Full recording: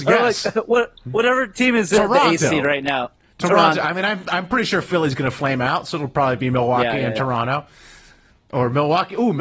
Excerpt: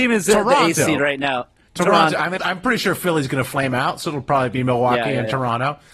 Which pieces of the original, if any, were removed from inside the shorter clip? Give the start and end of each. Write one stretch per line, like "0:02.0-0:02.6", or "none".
0:04.0-0:04.2